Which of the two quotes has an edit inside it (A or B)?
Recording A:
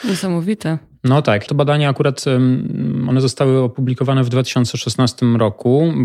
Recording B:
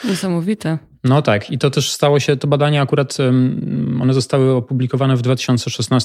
A